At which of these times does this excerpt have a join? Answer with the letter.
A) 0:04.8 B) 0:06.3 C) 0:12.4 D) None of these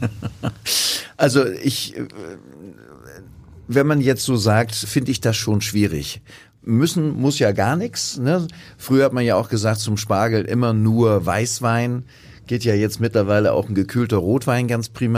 A